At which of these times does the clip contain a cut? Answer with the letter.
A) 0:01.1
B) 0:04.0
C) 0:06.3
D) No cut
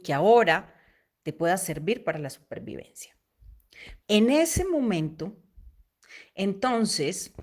B